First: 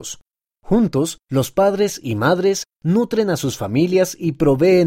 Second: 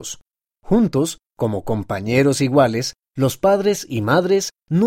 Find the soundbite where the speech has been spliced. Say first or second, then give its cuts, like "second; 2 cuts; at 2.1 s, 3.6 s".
first; 1 cut; at 1.2 s